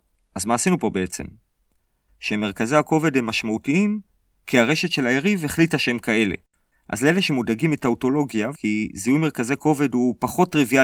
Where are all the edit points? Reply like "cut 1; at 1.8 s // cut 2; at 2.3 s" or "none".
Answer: cut 1; at 2.1 s // cut 2; at 6.7 s // cut 3; at 8.6 s